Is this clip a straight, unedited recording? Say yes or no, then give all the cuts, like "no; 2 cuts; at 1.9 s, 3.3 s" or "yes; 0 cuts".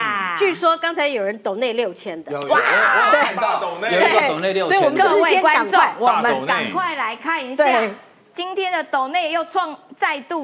yes; 0 cuts